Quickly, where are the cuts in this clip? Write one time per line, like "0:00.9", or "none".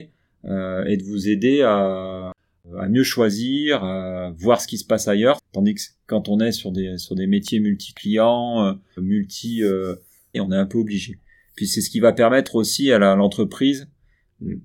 0:05.4
0:09.0
0:10.3